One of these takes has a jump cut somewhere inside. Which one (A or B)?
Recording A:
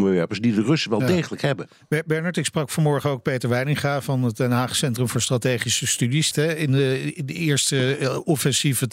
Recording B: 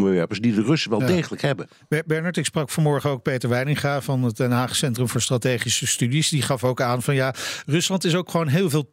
A